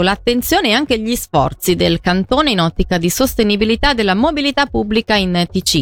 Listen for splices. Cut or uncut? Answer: uncut